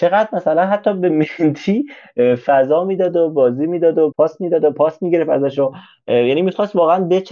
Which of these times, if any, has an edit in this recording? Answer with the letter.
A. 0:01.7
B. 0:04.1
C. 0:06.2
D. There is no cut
B